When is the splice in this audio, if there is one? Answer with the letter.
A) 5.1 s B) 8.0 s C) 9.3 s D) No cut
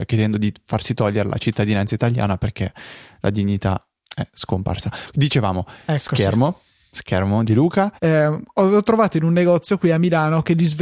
B